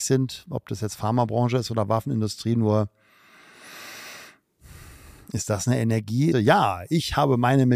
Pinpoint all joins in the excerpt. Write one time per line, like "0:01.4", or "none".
0:06.3